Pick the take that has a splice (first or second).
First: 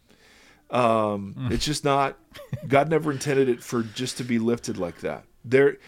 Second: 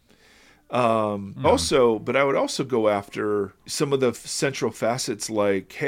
second